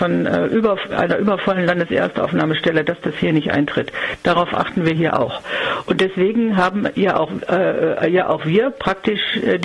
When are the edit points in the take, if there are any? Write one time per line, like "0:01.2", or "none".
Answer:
none